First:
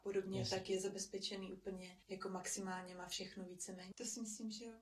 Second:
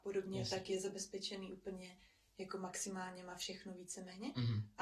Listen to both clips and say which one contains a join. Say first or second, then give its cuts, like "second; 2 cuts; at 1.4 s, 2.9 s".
first; 2 cuts; at 2.0 s, 3.9 s